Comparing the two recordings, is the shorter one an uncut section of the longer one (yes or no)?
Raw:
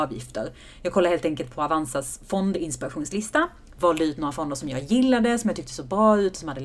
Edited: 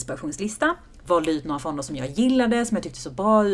yes